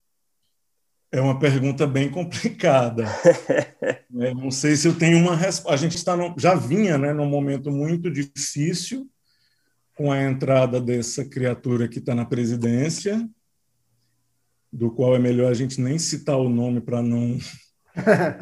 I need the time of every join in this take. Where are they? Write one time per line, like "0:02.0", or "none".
0:05.9